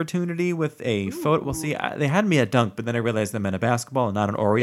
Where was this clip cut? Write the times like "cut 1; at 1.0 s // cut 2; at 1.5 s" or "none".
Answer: none